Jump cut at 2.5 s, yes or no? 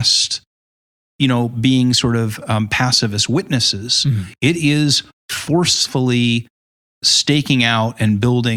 no